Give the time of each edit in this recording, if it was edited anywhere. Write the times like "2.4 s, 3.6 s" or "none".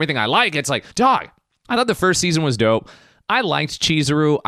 0.9 s

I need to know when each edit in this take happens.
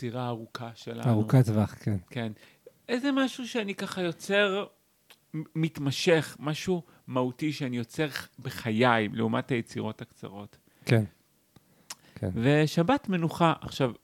none

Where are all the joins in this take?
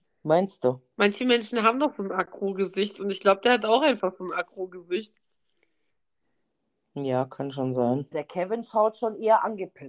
0.9 s, 8.1 s

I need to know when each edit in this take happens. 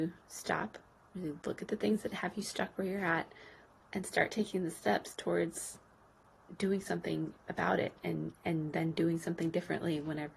3.8 s

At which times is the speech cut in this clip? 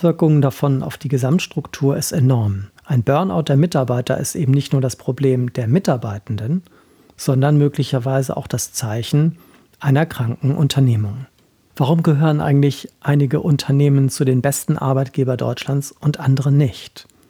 2.8 s, 11.7 s

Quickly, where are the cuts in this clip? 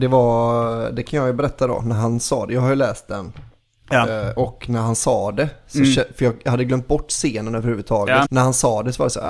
8.2 s

